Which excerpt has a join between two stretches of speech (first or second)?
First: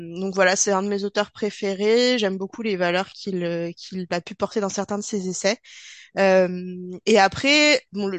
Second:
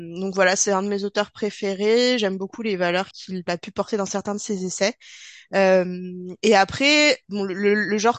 second